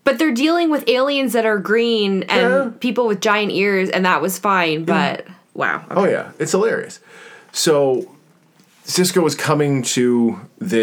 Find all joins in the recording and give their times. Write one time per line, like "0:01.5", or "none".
0:05.4